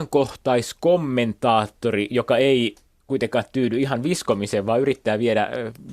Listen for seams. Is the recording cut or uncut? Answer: uncut